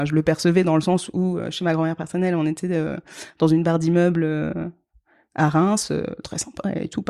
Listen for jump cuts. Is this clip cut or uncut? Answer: uncut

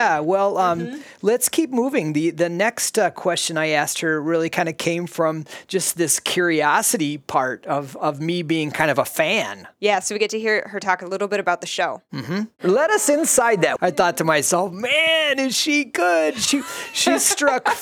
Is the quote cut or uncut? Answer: cut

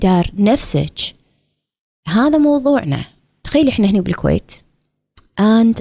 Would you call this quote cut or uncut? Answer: cut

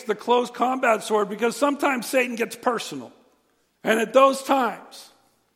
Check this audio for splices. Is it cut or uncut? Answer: cut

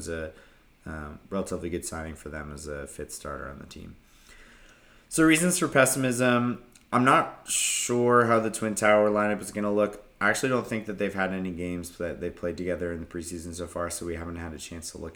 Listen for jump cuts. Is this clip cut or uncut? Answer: uncut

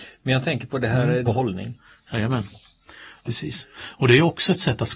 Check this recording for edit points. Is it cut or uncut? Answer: cut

